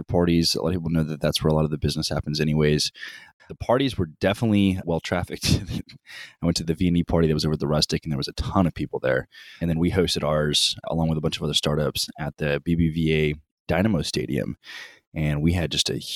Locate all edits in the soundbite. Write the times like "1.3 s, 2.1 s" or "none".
3.4 s

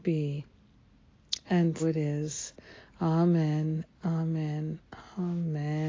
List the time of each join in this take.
1.8 s

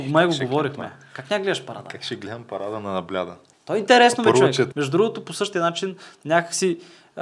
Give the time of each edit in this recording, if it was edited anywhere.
3.5 s, 4.7 s

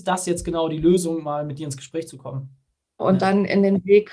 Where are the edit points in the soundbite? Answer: 3.0 s

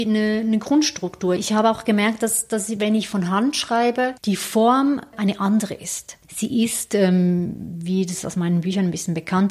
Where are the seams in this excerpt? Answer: 1.4 s

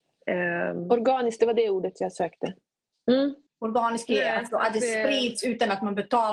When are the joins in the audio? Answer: 3.5 s

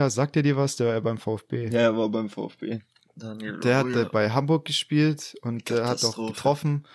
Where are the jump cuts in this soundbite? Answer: none

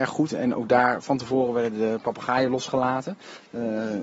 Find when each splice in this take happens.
none

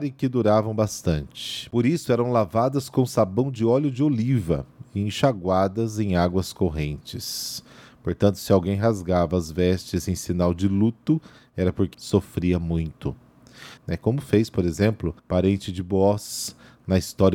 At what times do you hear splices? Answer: 11.9 s, 13.8 s, 15.2 s

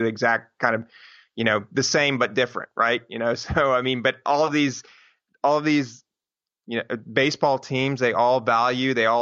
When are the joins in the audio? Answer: none

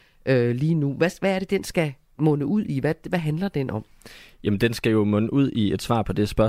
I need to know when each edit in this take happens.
none

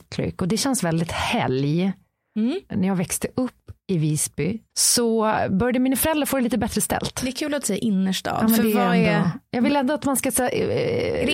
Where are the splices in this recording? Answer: 4.7 s

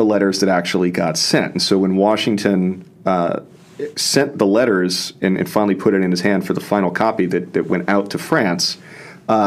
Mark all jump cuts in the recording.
none

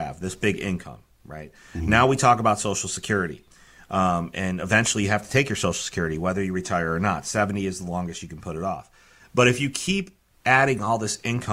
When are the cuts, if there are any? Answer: none

